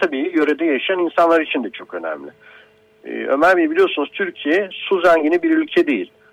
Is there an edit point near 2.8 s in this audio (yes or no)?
no